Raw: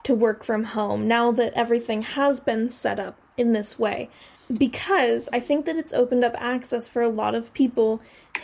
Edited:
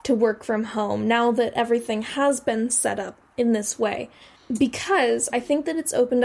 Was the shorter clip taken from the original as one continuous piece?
yes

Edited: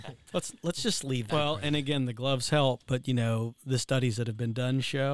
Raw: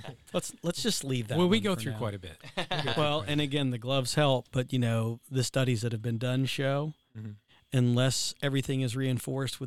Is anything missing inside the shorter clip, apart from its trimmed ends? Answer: yes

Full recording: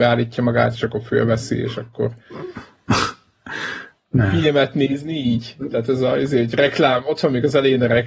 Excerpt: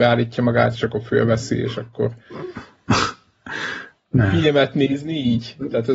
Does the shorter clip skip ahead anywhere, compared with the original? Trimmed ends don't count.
no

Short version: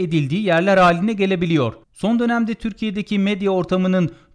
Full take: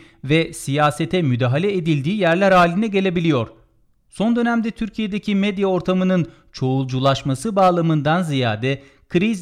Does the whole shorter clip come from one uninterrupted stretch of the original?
no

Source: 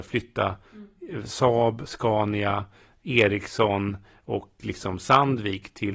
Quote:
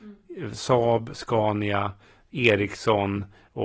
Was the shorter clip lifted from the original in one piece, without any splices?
yes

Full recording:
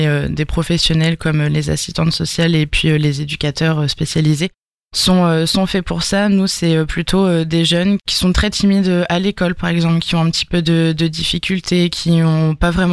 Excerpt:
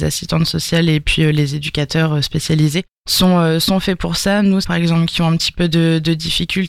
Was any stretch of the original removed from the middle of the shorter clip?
yes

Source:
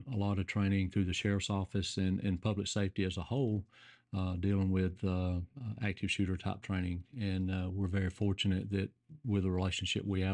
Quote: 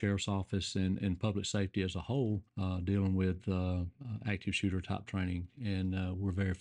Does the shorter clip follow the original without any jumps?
no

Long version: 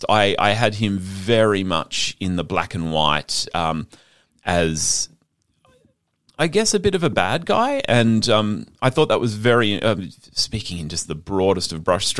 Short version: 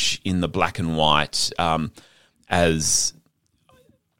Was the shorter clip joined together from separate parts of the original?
no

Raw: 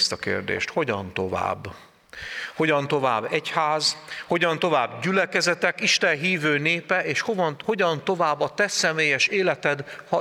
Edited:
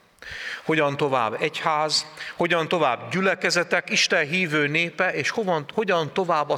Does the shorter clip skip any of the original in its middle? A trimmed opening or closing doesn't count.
no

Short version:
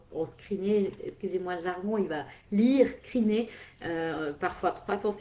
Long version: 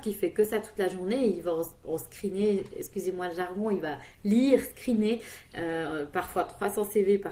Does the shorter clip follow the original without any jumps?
yes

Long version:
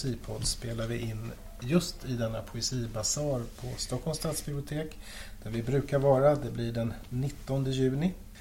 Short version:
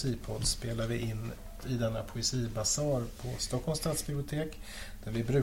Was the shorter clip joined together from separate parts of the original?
yes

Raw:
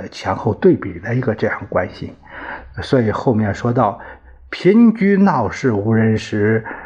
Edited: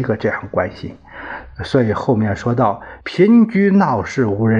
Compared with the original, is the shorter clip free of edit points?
no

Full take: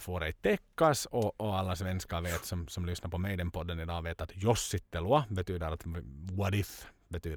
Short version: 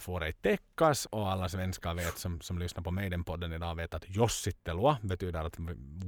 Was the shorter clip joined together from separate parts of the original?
yes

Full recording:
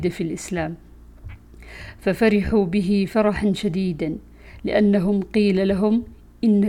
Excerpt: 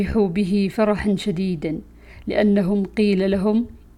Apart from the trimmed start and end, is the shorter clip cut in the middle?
no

